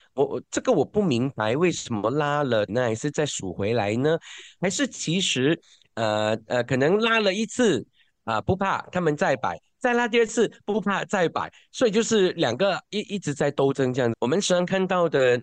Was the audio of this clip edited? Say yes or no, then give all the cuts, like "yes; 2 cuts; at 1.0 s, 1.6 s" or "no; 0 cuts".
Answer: yes; 2 cuts; at 2.7 s, 14.1 s